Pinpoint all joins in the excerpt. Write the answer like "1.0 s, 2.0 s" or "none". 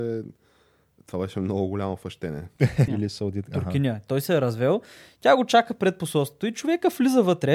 2.9 s

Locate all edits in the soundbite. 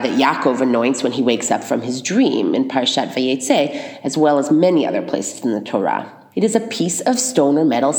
6.3 s

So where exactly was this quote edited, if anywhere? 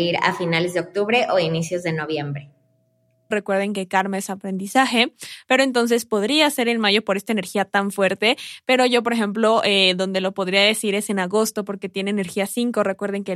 3.3 s

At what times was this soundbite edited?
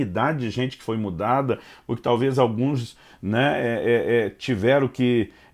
none

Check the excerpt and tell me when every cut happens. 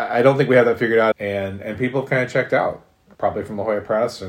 1.1 s, 3.1 s

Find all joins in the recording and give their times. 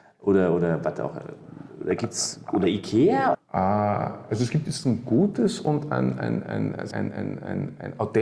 3.3 s, 6.9 s

